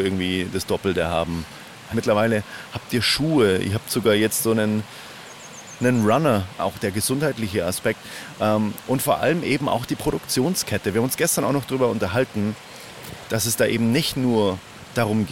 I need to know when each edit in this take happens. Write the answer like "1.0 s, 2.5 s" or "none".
1.9 s, 6.6 s, 13.3 s